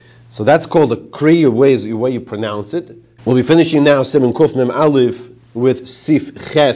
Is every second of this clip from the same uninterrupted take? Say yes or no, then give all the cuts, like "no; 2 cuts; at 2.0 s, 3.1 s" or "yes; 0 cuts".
no; 1 cut; at 3.2 s